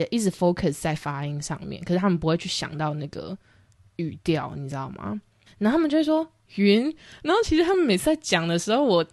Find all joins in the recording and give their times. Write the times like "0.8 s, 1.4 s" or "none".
5.5 s